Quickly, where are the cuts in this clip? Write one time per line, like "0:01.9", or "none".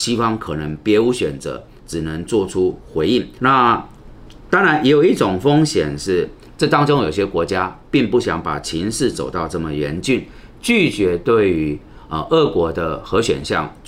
0:03.4